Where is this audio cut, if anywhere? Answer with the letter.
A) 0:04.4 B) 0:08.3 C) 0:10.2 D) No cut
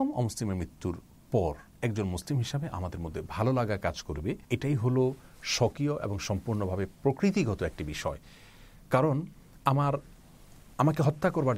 A